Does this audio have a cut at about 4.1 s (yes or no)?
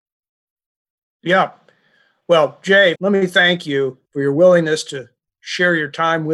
yes